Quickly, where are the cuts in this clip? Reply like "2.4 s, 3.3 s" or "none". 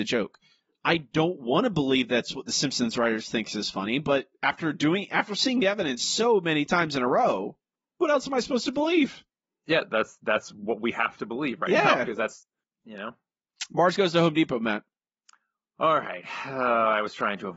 none